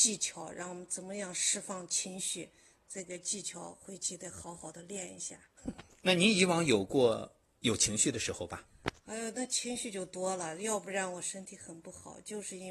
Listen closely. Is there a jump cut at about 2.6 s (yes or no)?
no